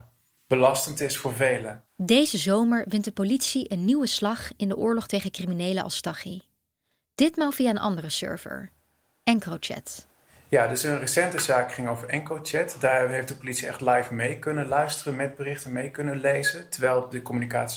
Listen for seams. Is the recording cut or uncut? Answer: cut